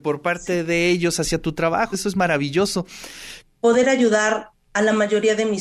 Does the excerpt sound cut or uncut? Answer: cut